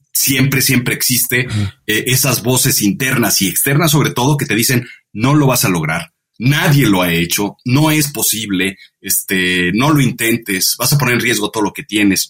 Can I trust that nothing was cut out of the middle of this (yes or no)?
no